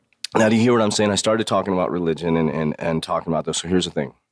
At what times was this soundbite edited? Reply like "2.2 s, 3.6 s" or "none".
none